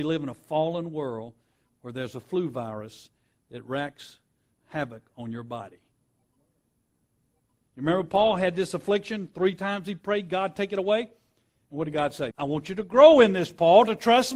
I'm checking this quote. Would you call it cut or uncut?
cut